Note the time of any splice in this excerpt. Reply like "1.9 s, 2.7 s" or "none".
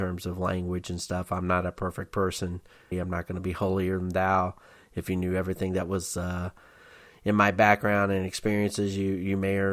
2.9 s